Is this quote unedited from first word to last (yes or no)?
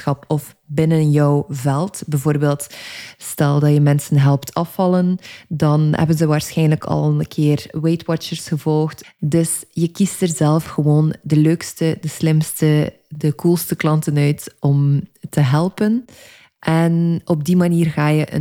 no